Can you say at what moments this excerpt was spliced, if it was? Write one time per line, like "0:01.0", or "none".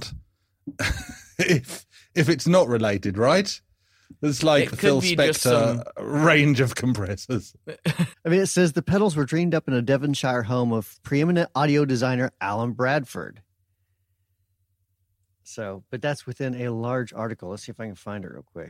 0:04.7
0:08.1